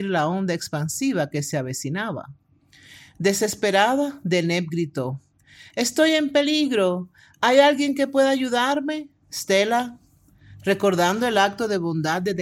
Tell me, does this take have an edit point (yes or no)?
no